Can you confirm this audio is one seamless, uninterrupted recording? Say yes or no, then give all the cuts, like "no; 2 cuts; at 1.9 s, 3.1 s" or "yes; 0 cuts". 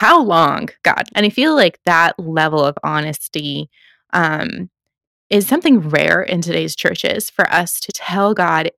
no; 2 cuts; at 1.1 s, 7.9 s